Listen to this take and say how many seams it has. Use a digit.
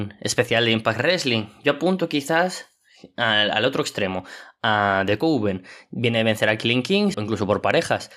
1